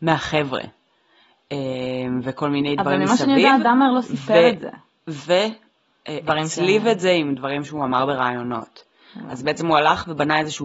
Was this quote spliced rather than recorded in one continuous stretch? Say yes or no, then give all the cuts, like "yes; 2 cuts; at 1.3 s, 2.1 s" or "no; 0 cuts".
no; 0 cuts